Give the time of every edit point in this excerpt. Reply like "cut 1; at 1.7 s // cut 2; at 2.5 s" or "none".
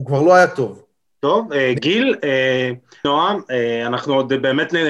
cut 1; at 1.1 s // cut 2; at 3.0 s